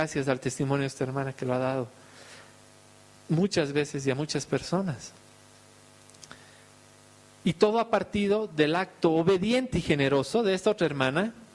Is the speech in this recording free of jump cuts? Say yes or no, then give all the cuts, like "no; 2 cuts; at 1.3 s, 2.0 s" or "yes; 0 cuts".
yes; 0 cuts